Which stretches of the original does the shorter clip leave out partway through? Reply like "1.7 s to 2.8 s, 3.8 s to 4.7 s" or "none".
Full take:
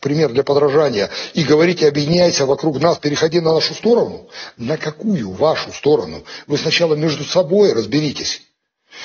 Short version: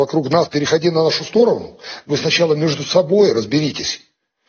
4.5 s to 6.5 s

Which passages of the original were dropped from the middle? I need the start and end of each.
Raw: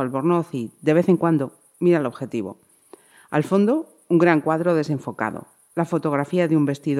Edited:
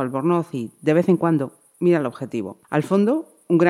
2.6 s to 3.2 s

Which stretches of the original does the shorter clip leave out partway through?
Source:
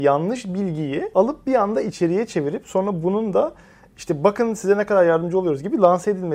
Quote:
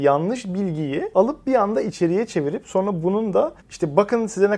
3.6 s to 3.9 s

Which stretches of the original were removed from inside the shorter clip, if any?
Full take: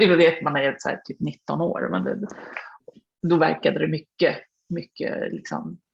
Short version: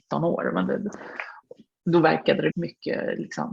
3.9 s to 4.6 s

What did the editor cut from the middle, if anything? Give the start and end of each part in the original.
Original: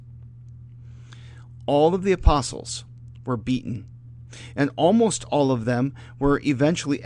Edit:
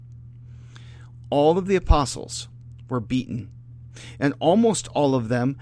none

